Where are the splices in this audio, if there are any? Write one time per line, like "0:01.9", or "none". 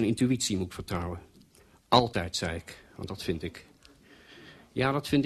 none